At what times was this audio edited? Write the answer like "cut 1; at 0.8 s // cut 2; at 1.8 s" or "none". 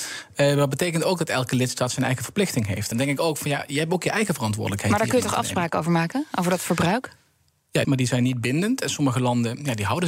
cut 1; at 2.9 s // cut 2; at 7.8 s